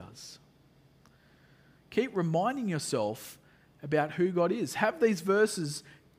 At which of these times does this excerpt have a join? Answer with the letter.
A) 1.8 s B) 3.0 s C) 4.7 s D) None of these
A